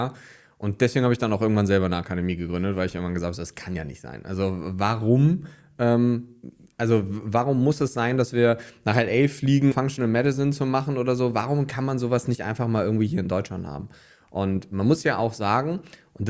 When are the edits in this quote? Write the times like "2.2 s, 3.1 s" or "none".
9.7 s